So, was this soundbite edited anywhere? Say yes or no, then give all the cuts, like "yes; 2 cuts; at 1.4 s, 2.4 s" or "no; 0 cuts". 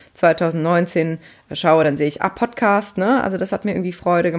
no; 0 cuts